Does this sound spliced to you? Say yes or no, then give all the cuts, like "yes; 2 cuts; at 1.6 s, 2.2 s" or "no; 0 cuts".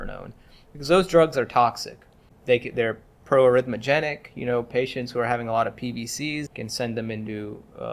yes; 1 cut; at 6.5 s